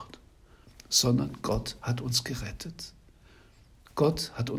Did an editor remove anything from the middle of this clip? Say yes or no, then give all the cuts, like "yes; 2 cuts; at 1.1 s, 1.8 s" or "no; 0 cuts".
no; 0 cuts